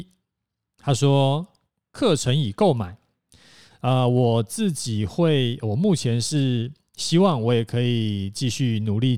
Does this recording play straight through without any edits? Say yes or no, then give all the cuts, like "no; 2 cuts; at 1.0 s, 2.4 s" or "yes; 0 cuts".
no; 1 cut; at 3.7 s